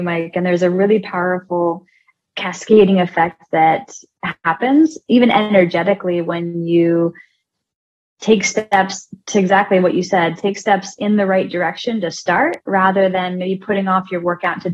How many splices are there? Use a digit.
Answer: 0